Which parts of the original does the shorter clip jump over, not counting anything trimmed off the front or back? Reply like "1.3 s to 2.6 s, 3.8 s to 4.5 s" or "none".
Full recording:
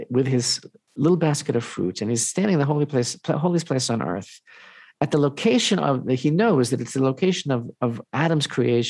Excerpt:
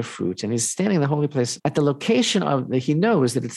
3.2 s to 4.9 s